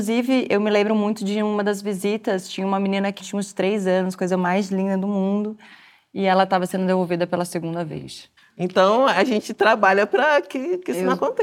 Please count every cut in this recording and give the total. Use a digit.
2